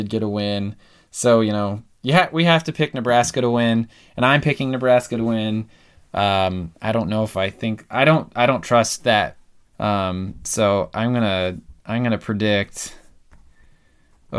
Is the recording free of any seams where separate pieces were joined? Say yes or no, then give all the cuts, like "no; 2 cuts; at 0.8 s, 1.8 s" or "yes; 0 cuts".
no; 2 cuts; at 9.7 s, 11.8 s